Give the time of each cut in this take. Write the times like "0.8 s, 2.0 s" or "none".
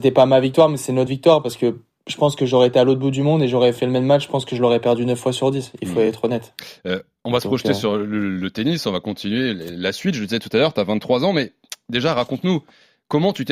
none